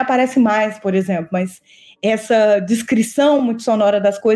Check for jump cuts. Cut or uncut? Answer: uncut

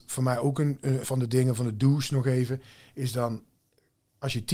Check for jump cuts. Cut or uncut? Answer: cut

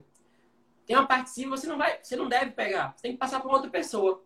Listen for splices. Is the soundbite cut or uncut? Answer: uncut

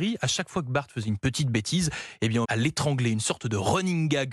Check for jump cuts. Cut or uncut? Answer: cut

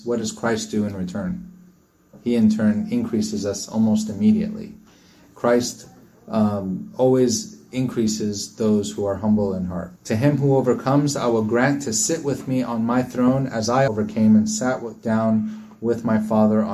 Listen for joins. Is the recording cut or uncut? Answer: cut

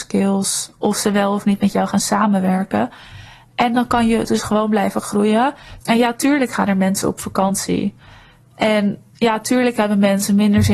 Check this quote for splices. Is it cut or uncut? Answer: cut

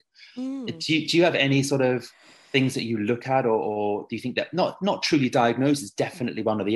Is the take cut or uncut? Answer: uncut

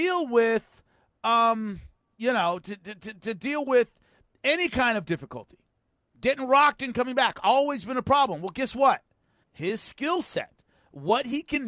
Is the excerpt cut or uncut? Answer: cut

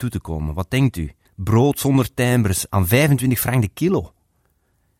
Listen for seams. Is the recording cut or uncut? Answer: cut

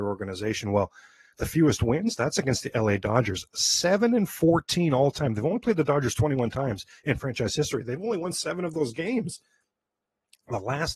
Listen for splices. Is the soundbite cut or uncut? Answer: uncut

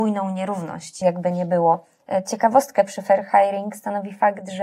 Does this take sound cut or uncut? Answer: cut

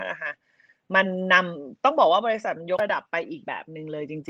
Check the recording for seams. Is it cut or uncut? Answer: uncut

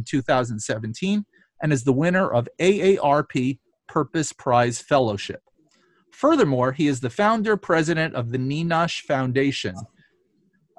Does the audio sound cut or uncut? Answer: uncut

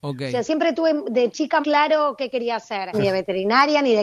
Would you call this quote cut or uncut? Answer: cut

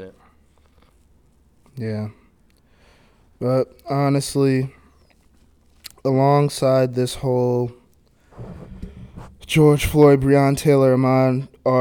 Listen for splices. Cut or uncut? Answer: uncut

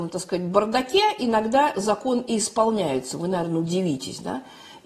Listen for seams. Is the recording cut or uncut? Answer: uncut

